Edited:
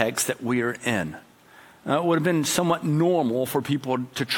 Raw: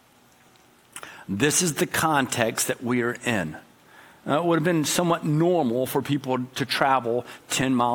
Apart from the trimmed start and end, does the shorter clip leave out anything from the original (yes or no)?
no